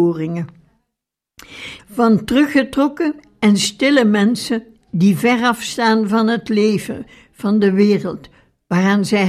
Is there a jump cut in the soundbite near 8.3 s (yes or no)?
no